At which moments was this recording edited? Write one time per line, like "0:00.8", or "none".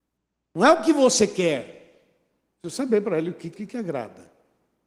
0:03.5